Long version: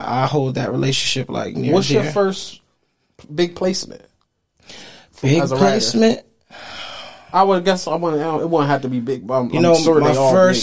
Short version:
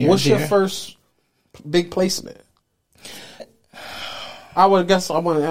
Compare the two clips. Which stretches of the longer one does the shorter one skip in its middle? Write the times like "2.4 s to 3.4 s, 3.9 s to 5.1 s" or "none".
5.0 s to 6.2 s

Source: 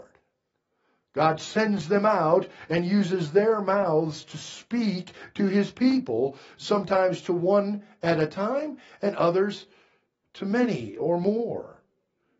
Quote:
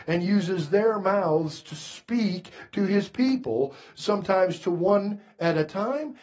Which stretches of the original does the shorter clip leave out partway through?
none

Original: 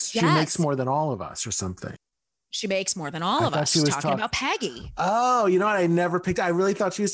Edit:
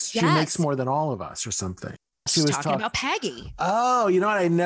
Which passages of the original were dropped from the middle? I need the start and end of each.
2.3 s to 3.6 s

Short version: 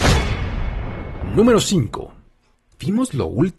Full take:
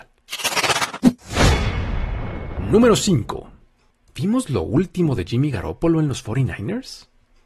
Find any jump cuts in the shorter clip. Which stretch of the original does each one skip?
none

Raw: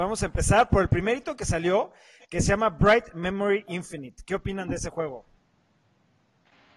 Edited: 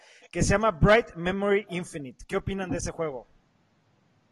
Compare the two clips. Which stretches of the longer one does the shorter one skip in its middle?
none

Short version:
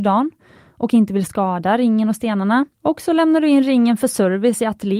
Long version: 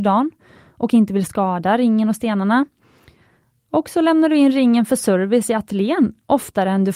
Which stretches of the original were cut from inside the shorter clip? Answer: 2.7 s to 3.6 s

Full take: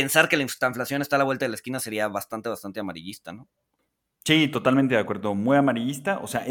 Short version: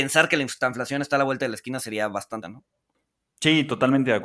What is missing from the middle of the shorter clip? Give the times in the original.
2.4 s to 3.3 s

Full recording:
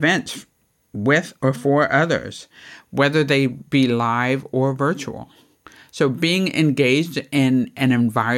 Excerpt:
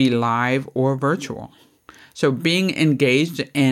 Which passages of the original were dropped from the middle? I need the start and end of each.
none

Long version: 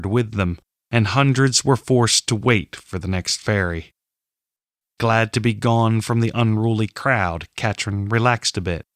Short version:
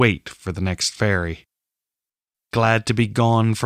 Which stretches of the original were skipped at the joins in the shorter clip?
none

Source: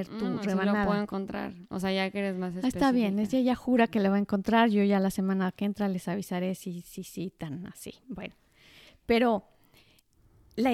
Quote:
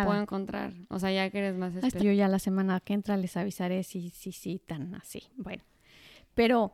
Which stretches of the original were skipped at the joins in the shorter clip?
2.8 s to 4.7 s

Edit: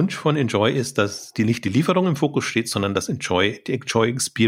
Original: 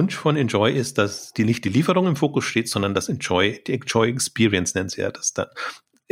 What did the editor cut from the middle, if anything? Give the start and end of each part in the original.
none

